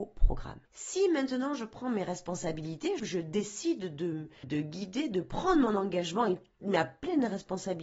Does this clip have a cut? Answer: yes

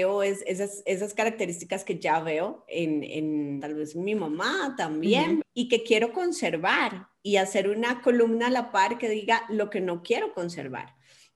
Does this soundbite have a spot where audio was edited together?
yes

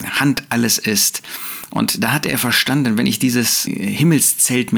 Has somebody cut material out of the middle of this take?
yes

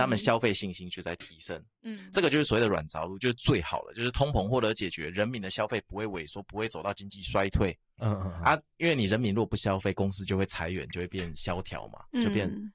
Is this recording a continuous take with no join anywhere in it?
no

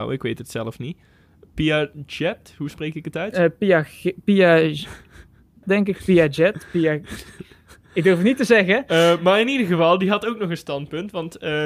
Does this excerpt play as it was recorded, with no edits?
no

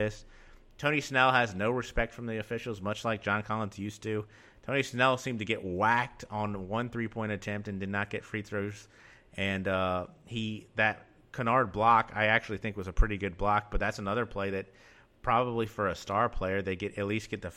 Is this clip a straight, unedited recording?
yes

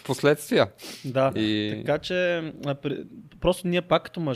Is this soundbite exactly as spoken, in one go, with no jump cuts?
yes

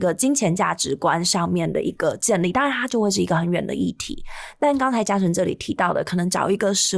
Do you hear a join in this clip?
no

